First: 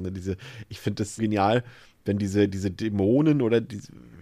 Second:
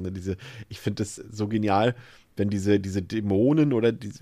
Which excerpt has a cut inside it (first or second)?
first